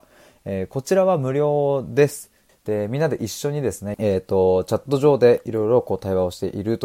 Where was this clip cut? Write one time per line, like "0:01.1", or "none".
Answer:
0:02.5
0:03.9